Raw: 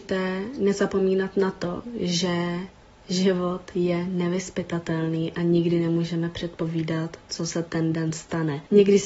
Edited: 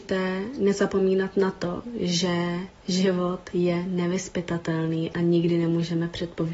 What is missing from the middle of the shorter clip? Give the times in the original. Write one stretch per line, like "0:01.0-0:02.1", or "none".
0:02.8-0:03.0